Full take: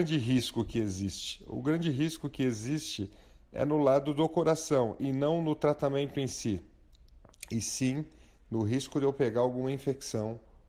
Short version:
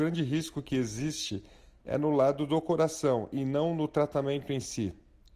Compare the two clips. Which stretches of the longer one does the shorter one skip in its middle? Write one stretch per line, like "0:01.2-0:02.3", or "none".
none